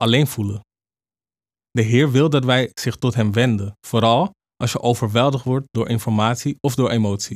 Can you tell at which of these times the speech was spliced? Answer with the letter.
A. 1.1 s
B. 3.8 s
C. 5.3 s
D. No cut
B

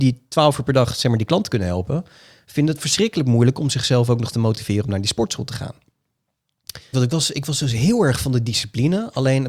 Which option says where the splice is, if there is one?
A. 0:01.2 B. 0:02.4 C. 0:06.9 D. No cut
C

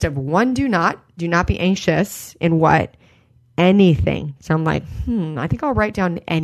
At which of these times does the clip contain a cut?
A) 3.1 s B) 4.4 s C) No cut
B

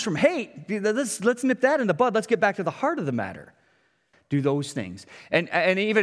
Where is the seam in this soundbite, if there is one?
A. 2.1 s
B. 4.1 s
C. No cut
B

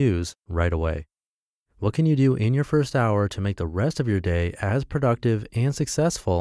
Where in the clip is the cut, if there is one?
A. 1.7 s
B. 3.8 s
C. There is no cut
A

